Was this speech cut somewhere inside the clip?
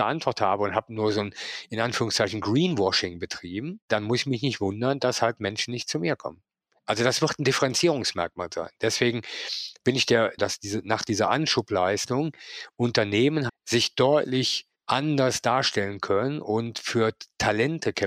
yes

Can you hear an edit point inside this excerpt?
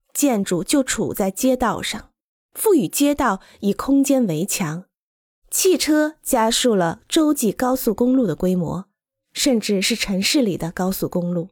yes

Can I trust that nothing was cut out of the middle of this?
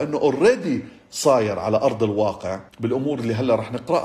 no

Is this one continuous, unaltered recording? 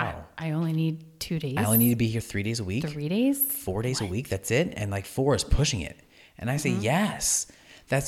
yes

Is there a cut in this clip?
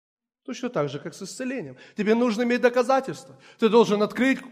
no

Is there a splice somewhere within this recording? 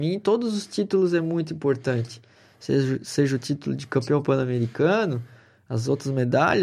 no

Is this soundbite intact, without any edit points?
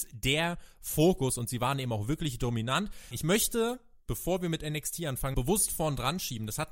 no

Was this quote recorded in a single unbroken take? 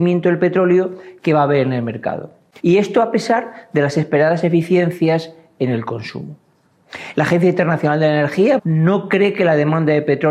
no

